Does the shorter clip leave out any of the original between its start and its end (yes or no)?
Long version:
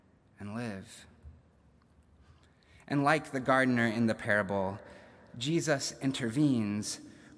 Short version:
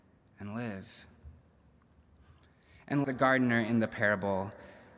yes